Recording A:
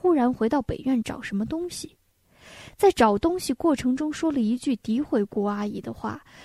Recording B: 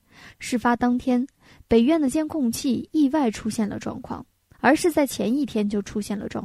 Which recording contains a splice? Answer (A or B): B